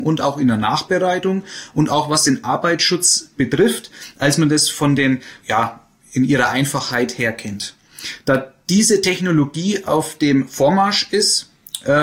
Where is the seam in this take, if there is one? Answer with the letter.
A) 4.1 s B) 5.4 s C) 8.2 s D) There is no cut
B